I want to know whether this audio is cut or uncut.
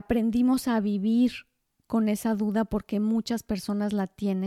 uncut